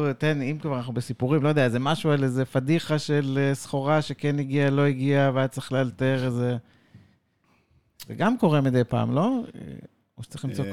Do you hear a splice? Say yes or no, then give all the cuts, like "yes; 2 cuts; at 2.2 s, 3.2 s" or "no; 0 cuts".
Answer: no; 0 cuts